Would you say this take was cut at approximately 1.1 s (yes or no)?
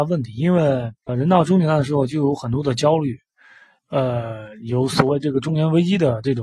yes